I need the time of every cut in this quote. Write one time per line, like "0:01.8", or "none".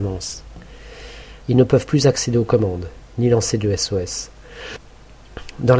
0:01.4